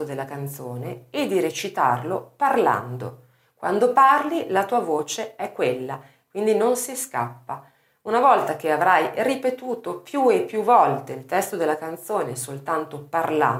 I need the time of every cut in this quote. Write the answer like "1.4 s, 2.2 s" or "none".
none